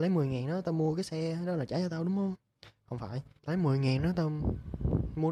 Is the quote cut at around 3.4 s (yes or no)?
yes